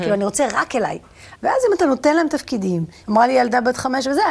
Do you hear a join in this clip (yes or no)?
yes